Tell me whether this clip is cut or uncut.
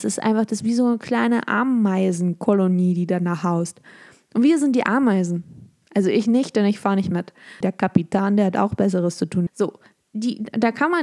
cut